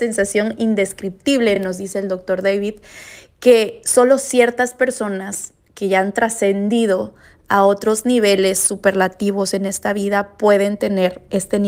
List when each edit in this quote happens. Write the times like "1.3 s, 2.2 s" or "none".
none